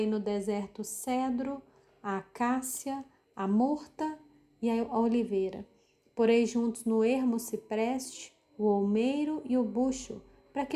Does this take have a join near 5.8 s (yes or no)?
no